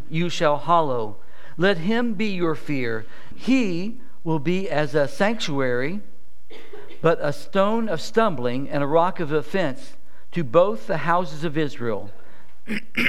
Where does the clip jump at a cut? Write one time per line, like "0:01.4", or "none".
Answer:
0:03.3